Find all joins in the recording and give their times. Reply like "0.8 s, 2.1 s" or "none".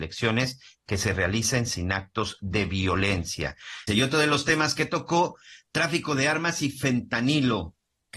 3.9 s

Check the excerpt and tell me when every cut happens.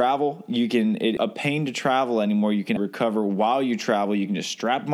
1.2 s, 2.8 s

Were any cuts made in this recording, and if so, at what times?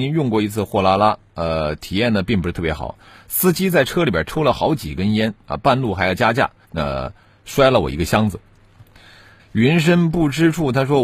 6.6 s, 9.4 s

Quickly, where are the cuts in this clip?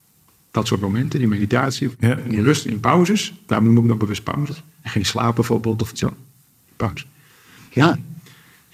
none

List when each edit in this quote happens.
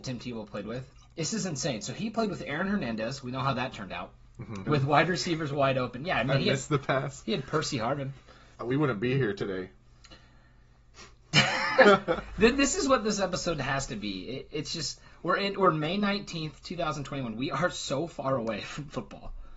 4.7 s, 8.5 s

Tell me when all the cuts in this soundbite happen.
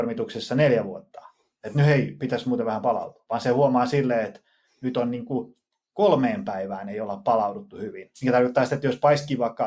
8.1 s

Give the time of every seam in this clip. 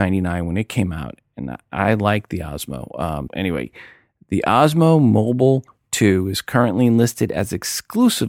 3.3 s

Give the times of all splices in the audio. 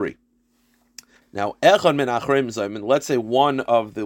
1.2 s

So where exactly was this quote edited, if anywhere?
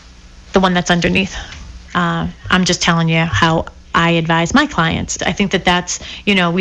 1.9 s, 5.2 s

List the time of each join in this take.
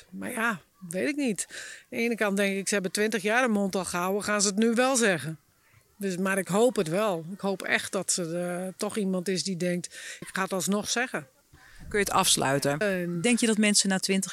10.2 s, 12.8 s

